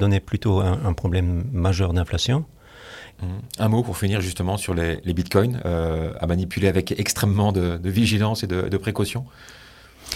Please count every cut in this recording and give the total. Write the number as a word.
one